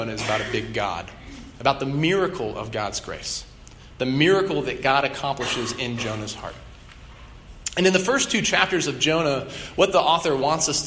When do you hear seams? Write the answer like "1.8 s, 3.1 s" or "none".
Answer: none